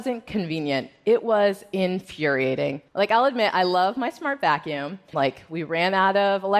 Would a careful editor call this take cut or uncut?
cut